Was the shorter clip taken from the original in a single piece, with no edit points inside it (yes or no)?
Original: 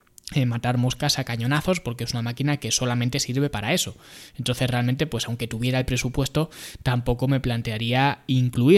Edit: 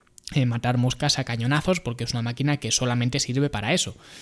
yes